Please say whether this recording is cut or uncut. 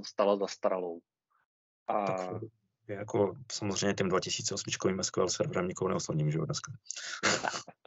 uncut